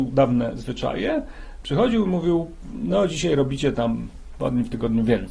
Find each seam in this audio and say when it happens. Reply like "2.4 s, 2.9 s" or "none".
none